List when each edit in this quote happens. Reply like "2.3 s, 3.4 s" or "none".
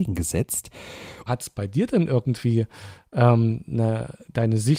1.3 s